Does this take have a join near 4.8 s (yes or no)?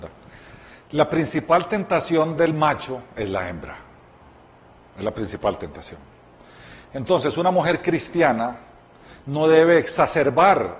no